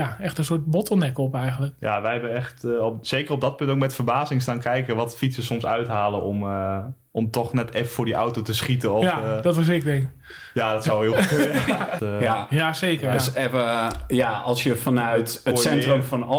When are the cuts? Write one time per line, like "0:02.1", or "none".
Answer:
0:12.0